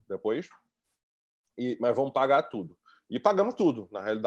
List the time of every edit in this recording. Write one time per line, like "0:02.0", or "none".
none